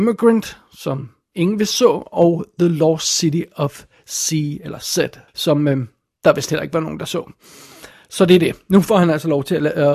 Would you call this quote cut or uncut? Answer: cut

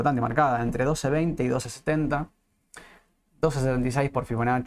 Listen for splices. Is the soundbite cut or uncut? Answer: uncut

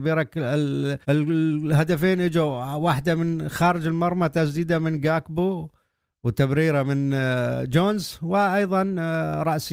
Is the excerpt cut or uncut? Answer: cut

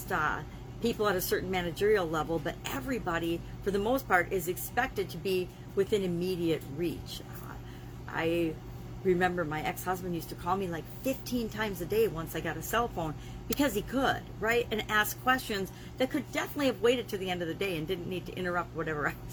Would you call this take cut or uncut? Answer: uncut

